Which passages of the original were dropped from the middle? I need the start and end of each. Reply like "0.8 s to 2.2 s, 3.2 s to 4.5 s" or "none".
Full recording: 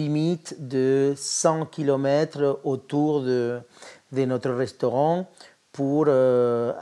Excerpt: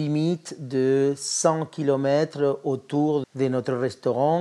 3.2 s to 4.0 s